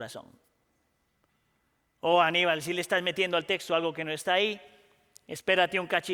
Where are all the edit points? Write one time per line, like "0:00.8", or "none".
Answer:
none